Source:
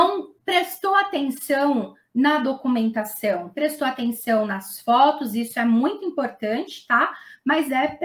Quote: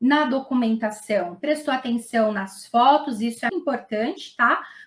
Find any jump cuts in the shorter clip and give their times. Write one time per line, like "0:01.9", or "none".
0:03.5